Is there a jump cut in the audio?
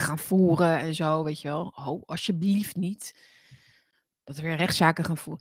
no; 0 cuts

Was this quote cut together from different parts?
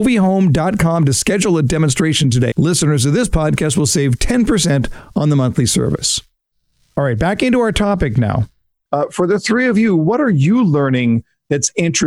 yes; 1 cut; at 2.5 s

